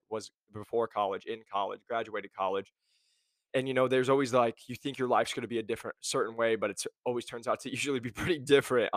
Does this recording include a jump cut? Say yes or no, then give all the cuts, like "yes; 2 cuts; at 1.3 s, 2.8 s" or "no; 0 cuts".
no; 0 cuts